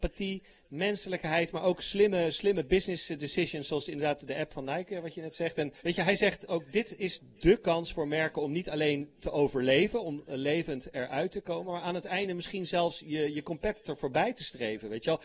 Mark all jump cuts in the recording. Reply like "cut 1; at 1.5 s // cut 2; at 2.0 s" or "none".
cut 1; at 5.8 s

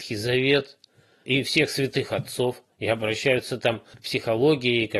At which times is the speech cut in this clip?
cut 1; at 1.2 s

